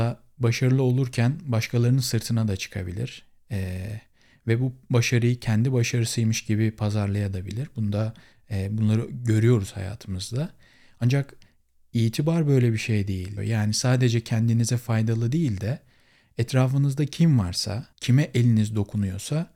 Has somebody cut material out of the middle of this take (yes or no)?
yes